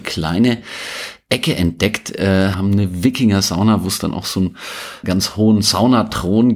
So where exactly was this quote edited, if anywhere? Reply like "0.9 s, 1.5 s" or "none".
2.5 s, 5.0 s